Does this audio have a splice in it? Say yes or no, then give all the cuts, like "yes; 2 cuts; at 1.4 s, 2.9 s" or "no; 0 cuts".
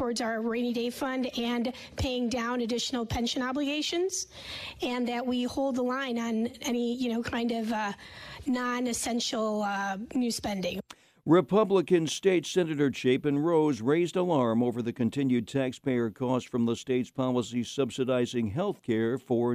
no; 0 cuts